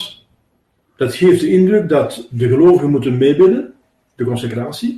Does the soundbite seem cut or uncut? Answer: uncut